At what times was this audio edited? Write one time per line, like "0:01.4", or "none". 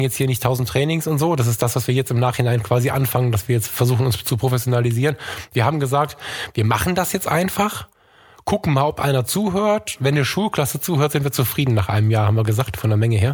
none